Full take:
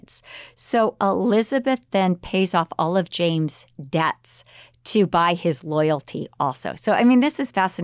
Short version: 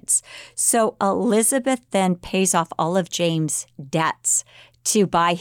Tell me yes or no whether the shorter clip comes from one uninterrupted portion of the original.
yes